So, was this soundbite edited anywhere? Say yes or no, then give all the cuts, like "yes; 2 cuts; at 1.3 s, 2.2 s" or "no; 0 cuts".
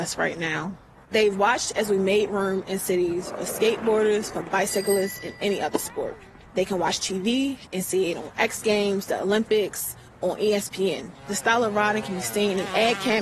no; 0 cuts